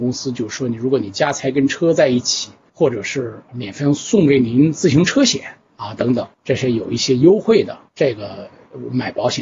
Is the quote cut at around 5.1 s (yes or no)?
no